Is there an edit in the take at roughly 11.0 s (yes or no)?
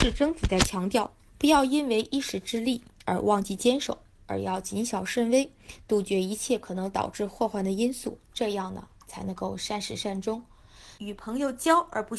yes